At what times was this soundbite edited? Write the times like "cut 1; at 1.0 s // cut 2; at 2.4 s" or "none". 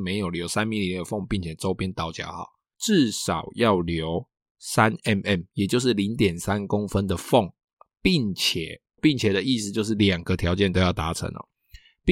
cut 1; at 2.7 s // cut 2; at 9.0 s